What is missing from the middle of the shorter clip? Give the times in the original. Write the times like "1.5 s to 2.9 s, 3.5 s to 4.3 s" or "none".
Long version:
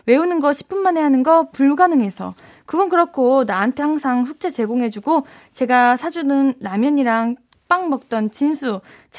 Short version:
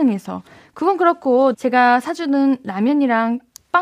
3.4 s to 5.5 s